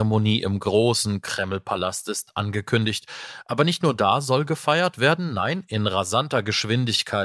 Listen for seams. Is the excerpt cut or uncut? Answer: uncut